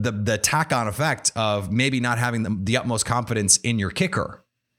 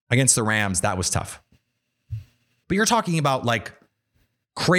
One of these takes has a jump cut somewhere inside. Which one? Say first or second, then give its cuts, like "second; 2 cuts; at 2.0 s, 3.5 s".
second; 1 cut; at 2.6 s